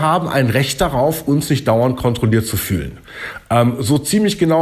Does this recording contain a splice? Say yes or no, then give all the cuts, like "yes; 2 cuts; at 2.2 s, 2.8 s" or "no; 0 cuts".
no; 0 cuts